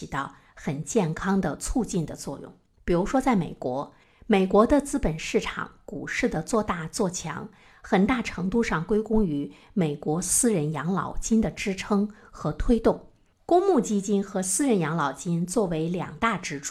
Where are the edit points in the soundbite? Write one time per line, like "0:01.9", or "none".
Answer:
none